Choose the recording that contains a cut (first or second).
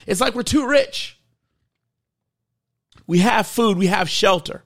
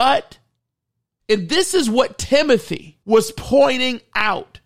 second